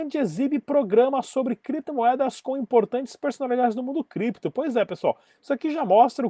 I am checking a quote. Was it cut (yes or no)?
no